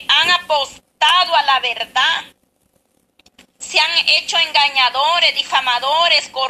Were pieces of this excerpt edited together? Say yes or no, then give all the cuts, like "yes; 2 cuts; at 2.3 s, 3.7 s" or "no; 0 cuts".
no; 0 cuts